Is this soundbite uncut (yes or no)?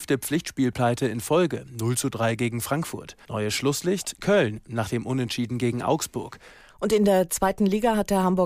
no